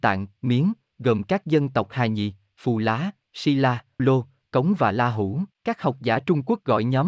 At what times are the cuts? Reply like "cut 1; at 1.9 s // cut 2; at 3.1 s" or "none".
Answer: cut 1; at 4.0 s // cut 2; at 5.5 s